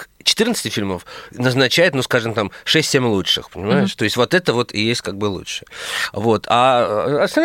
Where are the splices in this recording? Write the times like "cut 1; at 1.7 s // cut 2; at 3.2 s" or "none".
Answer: none